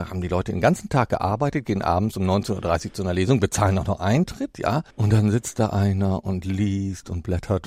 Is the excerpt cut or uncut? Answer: cut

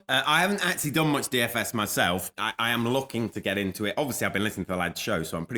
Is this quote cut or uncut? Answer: cut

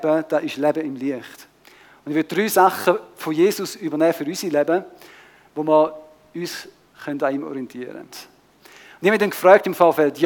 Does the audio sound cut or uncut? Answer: cut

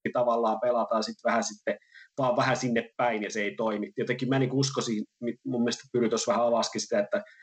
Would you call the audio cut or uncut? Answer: uncut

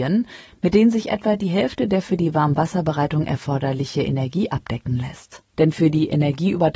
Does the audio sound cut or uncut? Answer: cut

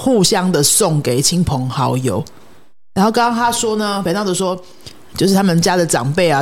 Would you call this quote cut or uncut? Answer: uncut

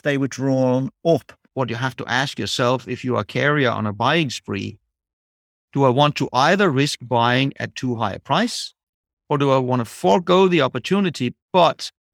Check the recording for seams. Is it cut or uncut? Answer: cut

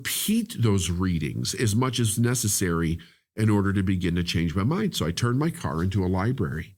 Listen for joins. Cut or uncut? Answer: uncut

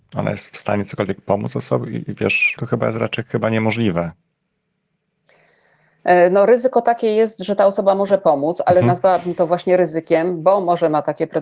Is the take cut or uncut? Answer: cut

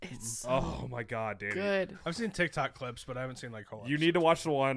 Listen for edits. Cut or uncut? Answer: uncut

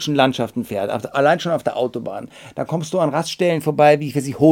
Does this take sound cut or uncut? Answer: uncut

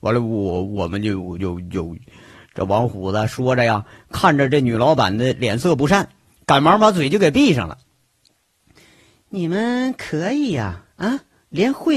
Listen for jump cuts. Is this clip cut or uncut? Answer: cut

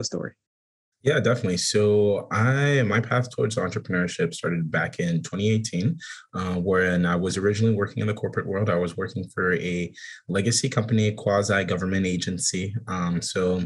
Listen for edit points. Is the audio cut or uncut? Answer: uncut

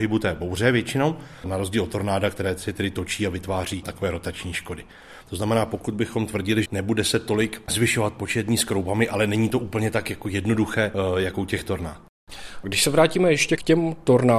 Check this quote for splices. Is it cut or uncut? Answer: cut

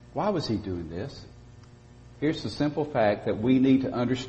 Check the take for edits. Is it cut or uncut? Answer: uncut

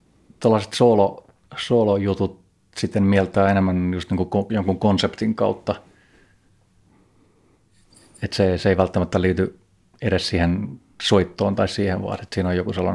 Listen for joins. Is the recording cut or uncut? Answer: uncut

